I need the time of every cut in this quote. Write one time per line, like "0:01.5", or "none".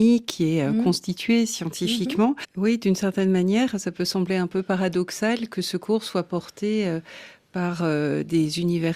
0:02.4